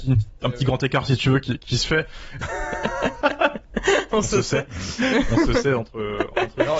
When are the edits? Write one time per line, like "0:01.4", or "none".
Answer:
0:02.4